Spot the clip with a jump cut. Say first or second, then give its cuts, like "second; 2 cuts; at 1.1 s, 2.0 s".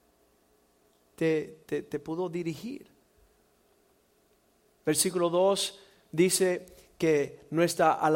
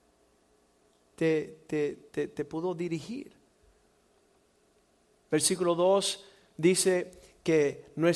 first; 1 cut; at 1.6 s